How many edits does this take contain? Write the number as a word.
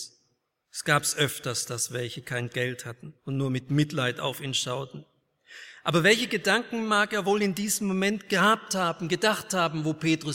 one